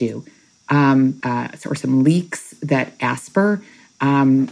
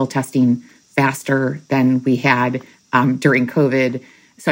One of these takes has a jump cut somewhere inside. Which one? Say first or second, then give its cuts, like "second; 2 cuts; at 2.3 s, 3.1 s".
first; 1 cut; at 1.2 s